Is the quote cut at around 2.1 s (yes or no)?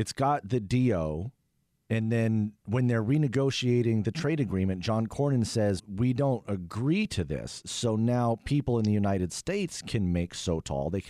no